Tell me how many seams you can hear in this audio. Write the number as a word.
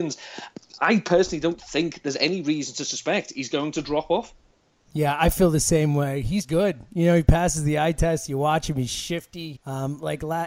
two